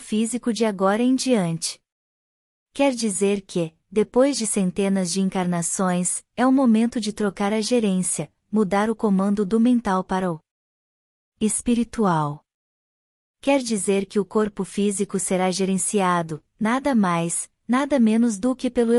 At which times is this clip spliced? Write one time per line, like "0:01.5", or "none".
0:02.6